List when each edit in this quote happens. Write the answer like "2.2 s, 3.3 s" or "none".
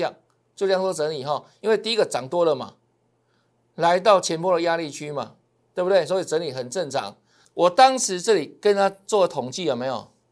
7.5 s